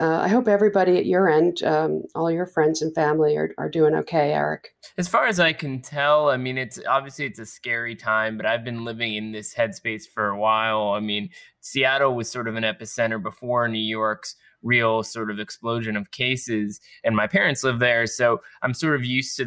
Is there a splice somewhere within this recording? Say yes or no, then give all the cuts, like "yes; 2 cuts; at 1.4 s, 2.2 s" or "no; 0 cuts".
no; 0 cuts